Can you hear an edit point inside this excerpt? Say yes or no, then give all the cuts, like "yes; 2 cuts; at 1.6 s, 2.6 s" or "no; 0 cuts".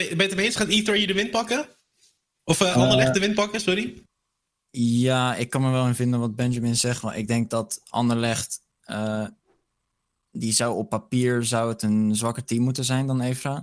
no; 0 cuts